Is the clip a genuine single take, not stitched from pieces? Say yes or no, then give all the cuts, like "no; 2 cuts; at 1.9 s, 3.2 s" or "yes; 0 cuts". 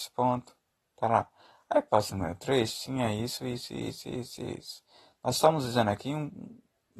yes; 0 cuts